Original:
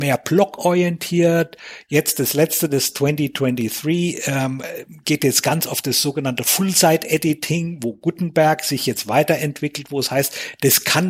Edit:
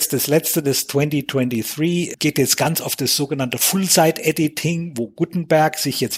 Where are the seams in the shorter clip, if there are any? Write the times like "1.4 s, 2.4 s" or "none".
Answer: 2.1 s